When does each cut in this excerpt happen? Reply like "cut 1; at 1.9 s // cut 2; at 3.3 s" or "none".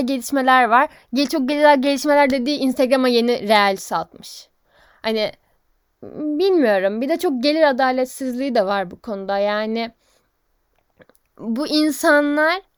none